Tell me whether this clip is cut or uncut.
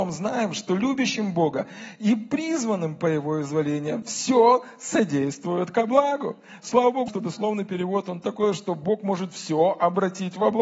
cut